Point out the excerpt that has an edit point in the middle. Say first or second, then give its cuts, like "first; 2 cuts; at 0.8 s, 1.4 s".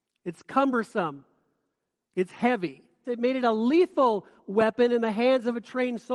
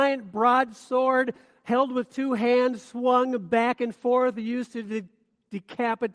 first; 1 cut; at 3.0 s